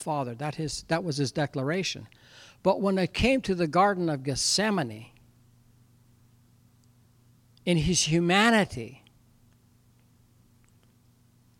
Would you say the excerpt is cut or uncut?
uncut